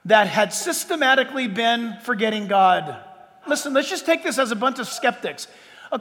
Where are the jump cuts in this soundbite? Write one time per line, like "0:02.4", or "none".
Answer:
none